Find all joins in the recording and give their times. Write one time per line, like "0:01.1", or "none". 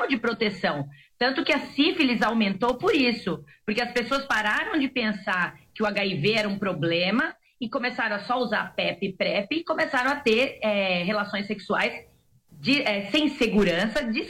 none